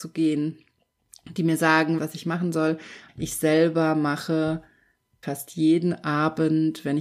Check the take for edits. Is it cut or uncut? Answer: cut